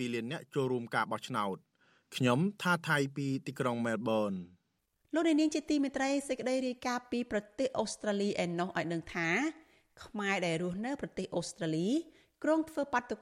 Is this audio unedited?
yes; 0 cuts

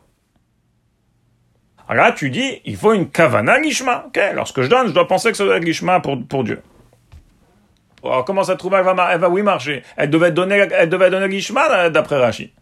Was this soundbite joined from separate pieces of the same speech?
yes; 2 cuts; at 1.8 s, 8.0 s

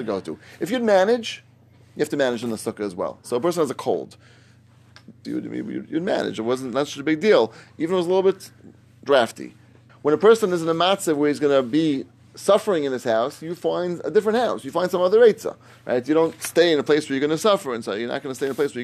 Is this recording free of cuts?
no; 2 cuts; at 5.2 s, 9.9 s

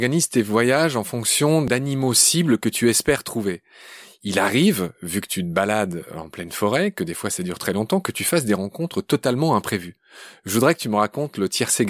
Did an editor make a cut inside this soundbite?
no; 0 cuts

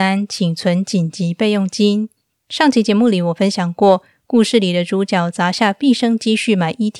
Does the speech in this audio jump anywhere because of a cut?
no; 0 cuts

